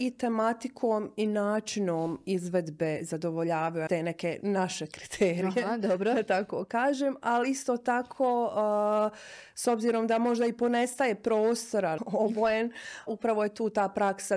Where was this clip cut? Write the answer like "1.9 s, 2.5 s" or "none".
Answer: 3.9 s, 12.0 s, 13.1 s